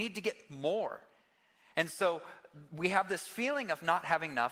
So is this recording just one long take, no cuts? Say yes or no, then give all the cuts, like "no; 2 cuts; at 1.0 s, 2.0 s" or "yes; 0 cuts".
yes; 0 cuts